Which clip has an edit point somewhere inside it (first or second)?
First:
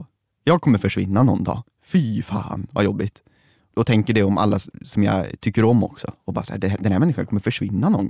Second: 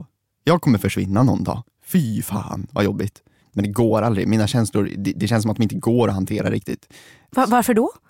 second